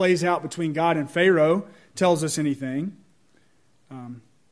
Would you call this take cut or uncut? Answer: uncut